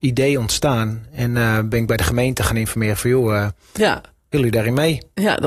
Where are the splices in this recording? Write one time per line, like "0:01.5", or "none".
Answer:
none